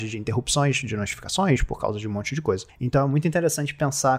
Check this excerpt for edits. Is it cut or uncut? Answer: uncut